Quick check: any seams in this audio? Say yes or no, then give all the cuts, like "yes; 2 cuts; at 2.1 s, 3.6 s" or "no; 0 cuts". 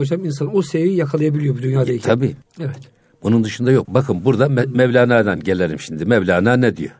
yes; 2 cuts; at 2.4 s, 3.8 s